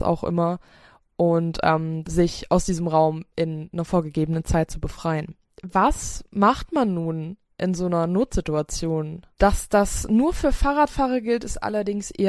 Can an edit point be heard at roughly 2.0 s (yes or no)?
yes